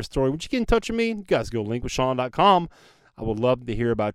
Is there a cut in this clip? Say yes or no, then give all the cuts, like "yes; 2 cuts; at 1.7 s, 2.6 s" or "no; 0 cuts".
no; 0 cuts